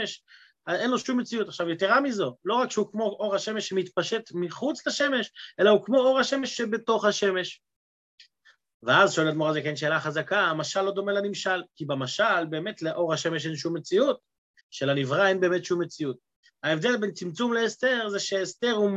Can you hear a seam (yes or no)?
yes